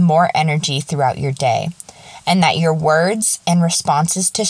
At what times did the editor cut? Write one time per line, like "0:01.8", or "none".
0:03.4

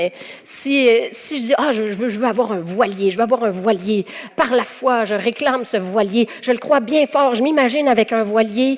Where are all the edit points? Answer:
0:04.3

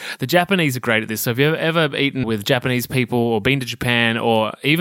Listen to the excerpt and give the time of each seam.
0:02.2

